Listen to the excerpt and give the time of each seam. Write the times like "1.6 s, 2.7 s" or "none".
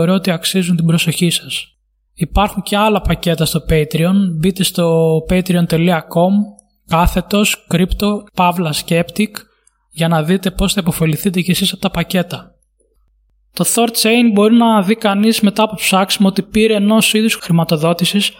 2.1 s

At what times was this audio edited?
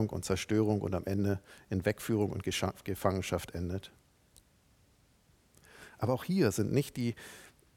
none

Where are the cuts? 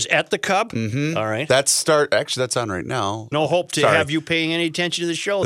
3.3 s

